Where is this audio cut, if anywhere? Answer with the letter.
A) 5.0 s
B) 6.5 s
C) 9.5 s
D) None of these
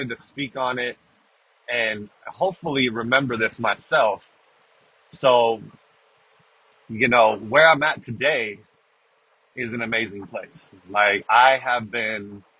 D